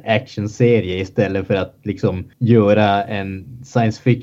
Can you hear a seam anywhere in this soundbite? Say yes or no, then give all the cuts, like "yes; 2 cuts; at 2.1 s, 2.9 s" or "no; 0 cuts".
yes; 1 cut; at 2.3 s